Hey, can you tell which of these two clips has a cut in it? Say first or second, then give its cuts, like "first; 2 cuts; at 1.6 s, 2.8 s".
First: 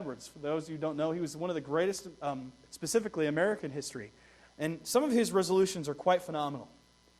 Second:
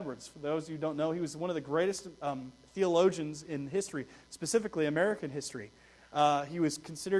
first; 2 cuts; at 2.6 s, 4.5 s